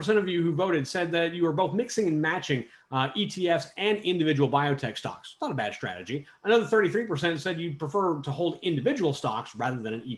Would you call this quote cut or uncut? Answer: uncut